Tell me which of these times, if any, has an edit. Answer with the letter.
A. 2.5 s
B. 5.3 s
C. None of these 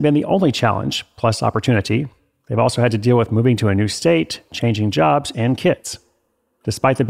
B